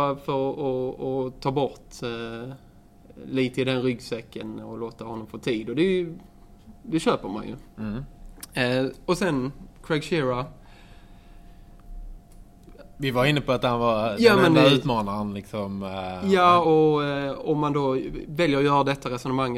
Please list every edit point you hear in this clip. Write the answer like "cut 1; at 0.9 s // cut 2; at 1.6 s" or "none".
none